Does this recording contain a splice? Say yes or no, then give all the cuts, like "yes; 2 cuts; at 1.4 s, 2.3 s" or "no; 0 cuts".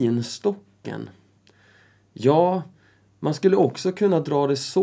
no; 0 cuts